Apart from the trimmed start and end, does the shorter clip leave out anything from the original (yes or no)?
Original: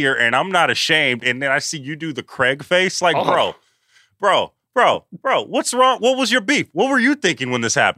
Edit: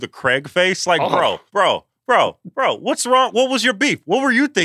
yes